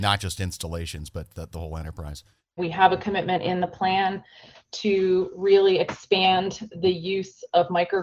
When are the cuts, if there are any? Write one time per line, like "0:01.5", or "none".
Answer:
0:02.6